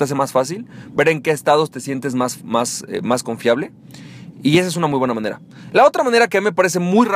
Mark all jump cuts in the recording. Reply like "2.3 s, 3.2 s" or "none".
none